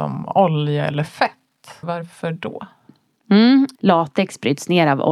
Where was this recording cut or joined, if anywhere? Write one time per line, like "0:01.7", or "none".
0:01.8
0:03.7